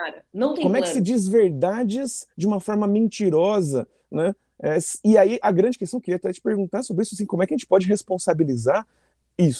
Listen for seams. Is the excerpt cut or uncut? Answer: uncut